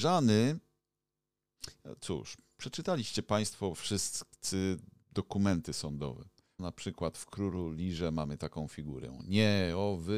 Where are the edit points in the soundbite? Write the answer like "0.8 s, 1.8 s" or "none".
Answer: 6.6 s

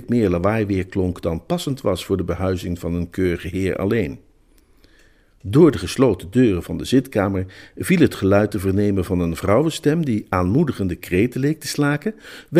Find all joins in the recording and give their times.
none

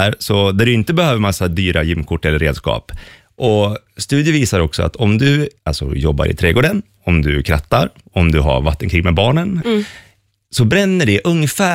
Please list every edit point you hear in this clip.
5.6 s, 9.6 s

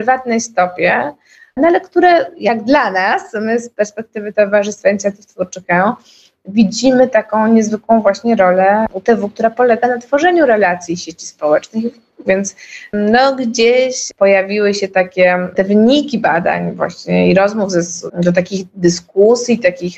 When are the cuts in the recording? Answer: 12.3 s, 18.1 s

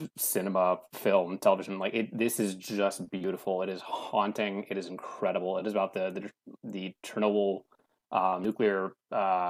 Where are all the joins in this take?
none

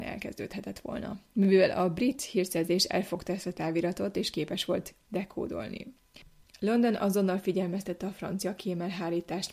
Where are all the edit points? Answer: 6.4 s

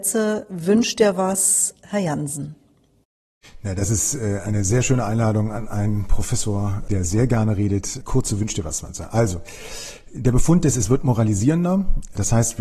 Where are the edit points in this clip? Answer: none

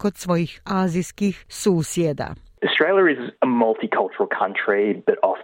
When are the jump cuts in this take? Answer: none

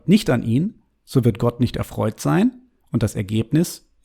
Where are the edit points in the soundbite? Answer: none

